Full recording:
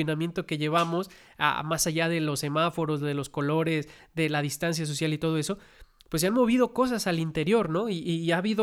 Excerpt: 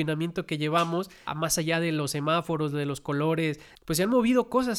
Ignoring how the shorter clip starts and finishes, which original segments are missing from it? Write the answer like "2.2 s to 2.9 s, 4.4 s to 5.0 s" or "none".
1.3 s to 1.6 s, 4.0 s to 6.0 s